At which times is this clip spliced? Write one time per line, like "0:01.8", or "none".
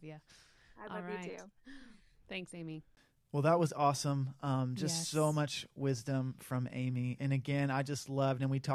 0:07.2